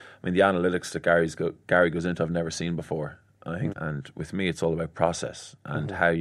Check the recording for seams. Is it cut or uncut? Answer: cut